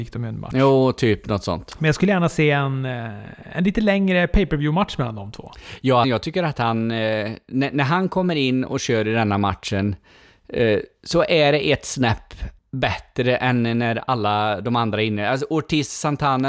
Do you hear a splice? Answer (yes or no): yes